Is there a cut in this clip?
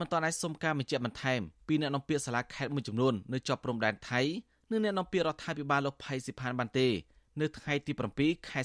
no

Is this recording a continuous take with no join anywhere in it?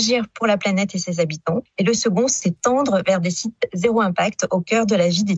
yes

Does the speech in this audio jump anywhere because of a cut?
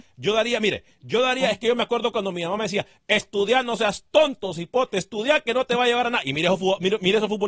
no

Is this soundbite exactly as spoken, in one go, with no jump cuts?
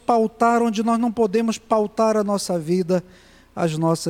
yes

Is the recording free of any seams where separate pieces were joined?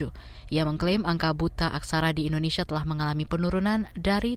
yes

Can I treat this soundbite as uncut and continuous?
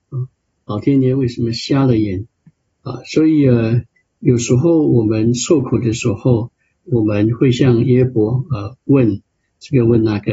no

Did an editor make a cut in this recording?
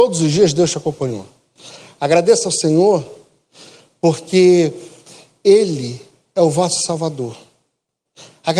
no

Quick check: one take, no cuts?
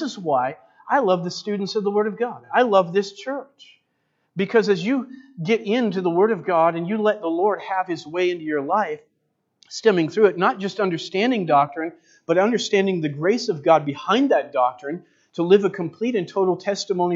yes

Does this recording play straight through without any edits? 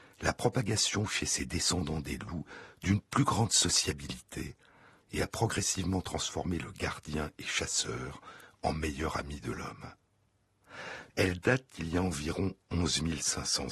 no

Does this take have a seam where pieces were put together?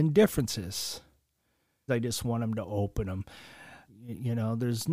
yes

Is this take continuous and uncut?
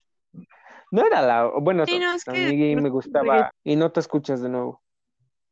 no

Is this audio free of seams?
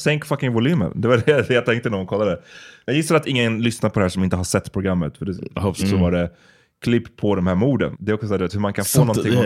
no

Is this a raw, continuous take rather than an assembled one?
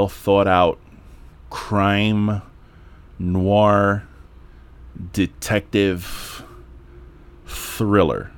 yes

